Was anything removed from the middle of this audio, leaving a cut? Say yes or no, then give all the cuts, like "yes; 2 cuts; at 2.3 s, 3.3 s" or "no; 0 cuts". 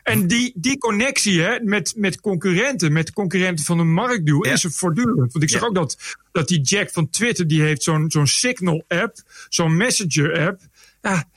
no; 0 cuts